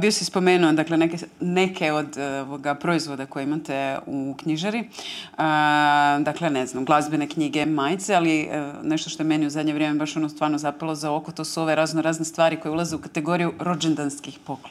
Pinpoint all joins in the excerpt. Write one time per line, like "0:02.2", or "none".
0:07.6